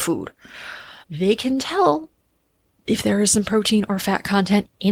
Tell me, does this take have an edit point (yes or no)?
yes